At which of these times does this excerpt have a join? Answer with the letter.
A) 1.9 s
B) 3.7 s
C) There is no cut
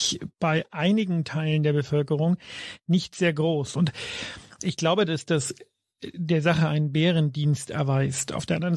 B